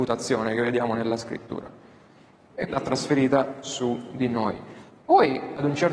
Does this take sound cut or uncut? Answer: cut